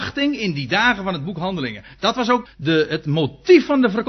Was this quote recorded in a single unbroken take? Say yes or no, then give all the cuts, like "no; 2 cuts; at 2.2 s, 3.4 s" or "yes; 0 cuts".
no; 1 cut; at 2.5 s